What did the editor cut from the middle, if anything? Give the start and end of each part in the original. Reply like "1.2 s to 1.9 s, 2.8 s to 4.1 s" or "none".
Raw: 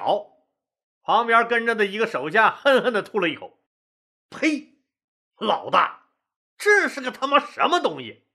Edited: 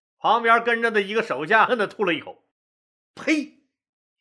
2.5 s to 2.8 s